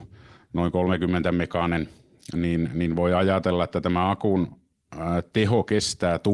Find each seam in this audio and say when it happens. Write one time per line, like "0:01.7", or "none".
none